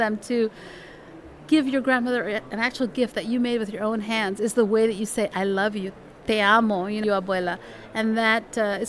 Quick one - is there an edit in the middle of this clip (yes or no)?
yes